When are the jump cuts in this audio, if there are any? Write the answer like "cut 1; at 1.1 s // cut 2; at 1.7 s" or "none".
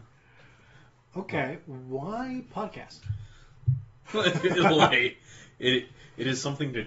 cut 1; at 4.1 s